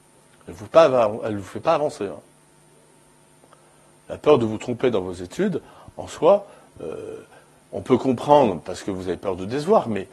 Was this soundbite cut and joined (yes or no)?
no